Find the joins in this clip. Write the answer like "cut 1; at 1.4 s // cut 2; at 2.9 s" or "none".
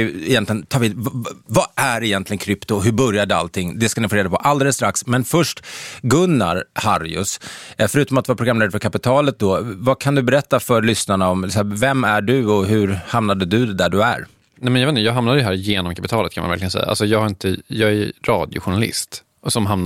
none